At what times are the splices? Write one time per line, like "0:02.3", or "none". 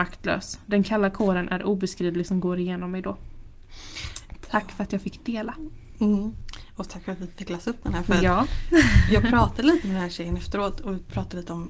none